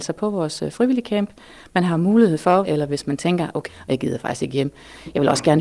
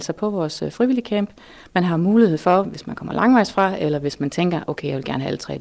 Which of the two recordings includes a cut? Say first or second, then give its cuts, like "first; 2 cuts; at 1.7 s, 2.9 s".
first; 2 cuts; at 2.6 s, 3.7 s